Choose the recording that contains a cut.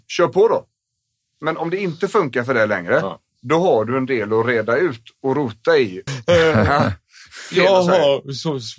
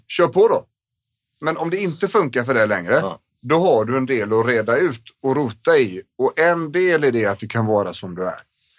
first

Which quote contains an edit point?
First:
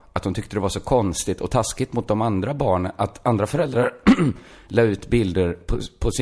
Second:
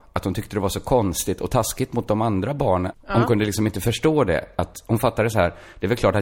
second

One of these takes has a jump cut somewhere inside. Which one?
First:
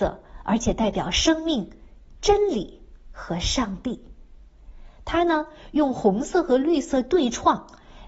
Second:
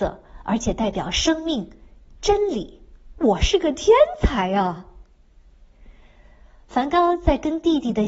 second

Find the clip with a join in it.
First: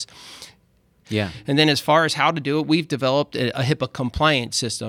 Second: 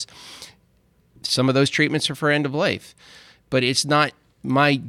first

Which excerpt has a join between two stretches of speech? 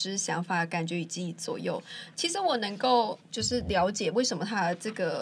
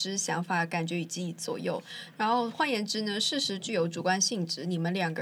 first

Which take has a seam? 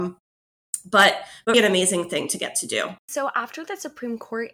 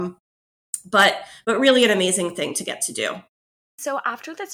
first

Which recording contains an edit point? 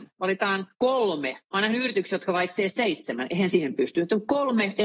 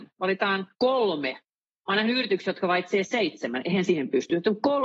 first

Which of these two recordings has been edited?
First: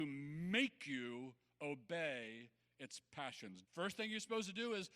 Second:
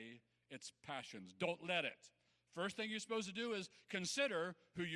first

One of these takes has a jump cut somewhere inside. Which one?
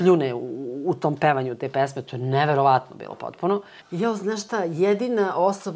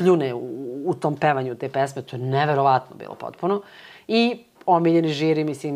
first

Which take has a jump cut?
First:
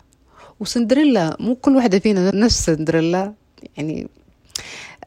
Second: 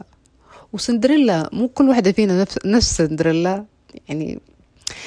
first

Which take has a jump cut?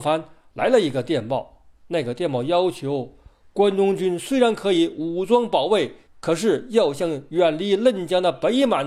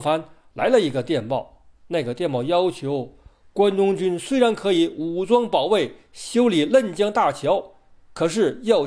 first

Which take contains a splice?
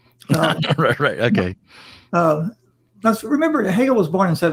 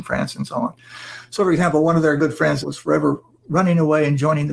second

